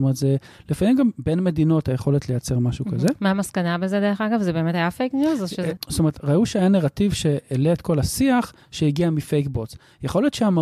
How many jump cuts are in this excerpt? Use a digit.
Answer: 1